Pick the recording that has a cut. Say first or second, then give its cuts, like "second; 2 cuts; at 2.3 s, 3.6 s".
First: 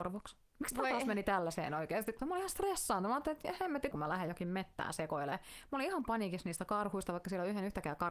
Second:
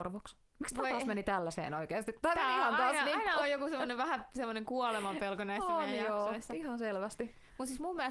first; 2 cuts; at 2.2 s, 3.9 s